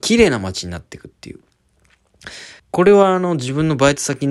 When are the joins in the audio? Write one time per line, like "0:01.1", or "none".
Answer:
0:02.6